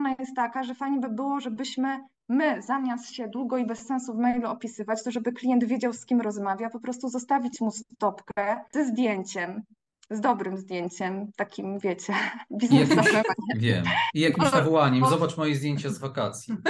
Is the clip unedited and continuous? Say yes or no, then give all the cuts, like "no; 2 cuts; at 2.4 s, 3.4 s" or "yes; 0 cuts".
yes; 0 cuts